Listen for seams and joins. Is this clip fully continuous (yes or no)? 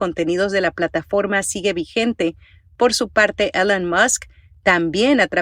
yes